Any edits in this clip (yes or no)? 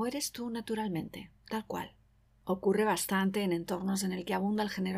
yes